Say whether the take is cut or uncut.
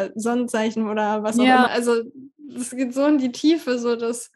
cut